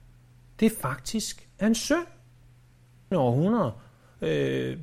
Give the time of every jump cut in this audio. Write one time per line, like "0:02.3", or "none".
0:03.1